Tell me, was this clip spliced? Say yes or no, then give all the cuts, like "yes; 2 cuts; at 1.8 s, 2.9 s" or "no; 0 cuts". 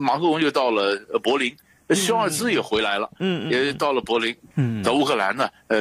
yes; 1 cut; at 4.5 s